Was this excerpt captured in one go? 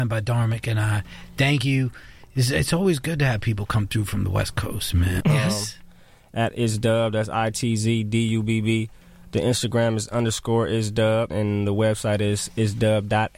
no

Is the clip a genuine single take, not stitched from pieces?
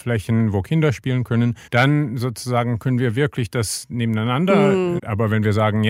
no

